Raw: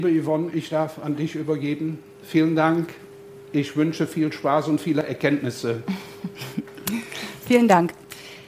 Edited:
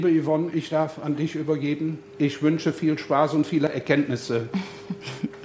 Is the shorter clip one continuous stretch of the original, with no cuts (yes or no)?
no